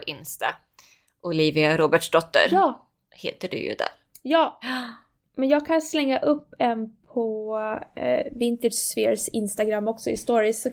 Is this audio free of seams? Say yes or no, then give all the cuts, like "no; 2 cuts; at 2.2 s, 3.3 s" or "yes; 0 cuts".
yes; 0 cuts